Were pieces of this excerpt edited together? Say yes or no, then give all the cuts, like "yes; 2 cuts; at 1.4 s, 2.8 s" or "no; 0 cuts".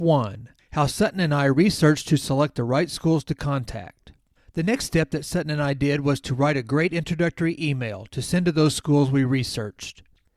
no; 0 cuts